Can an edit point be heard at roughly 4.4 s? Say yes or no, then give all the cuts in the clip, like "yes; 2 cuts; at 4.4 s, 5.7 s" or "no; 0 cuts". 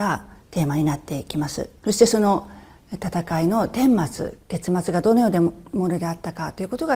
yes; 2 cuts; at 1.8 s, 4.4 s